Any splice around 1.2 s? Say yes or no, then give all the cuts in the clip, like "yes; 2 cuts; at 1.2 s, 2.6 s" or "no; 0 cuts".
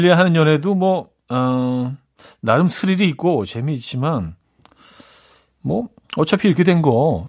no; 0 cuts